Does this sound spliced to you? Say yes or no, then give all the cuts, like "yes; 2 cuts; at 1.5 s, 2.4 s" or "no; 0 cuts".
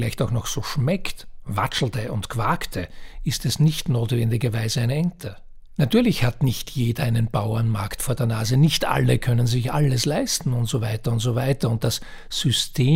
yes; 1 cut; at 5.8 s